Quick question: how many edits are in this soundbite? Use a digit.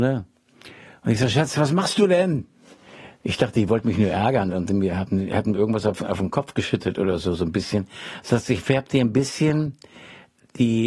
0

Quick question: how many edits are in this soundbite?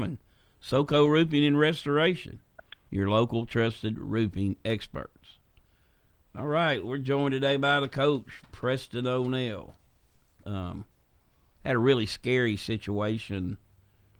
1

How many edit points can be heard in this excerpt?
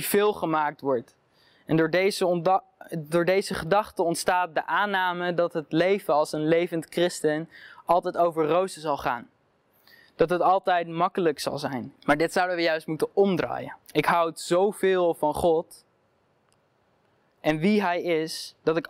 2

